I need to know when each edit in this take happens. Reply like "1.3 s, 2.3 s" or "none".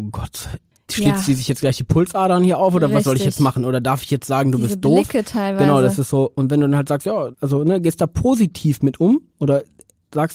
7.3 s